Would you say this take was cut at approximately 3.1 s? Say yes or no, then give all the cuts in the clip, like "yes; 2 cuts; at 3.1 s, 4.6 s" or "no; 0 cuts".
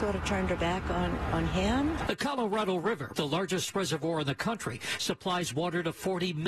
yes; 2 cuts; at 2.1 s, 3.1 s